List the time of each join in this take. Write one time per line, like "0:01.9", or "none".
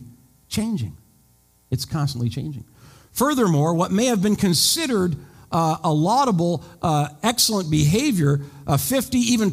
none